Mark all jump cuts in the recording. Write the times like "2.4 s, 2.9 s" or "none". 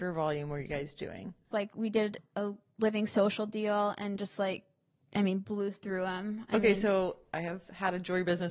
1.5 s